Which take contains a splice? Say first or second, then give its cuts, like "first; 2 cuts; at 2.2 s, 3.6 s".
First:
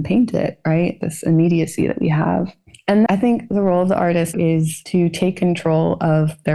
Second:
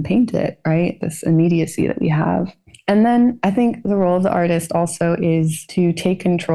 first; 2 cuts; at 3.1 s, 4.3 s